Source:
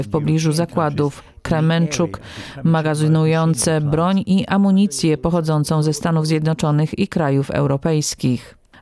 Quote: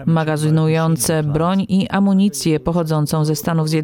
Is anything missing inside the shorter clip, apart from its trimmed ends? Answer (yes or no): no